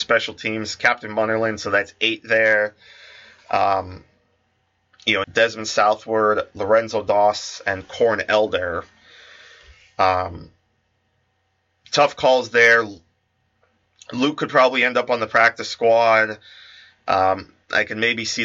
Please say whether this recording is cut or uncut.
cut